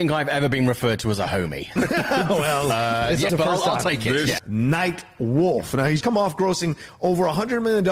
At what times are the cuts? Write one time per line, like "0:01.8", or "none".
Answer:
0:03.3
0:04.4
0:06.0